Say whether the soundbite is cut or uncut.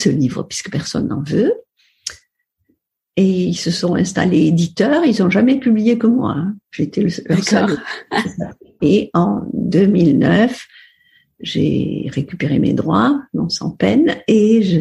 cut